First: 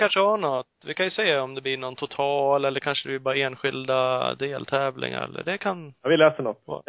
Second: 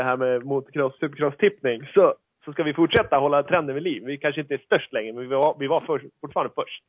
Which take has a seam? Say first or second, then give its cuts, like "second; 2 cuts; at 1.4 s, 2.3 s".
second; 1 cut; at 1.0 s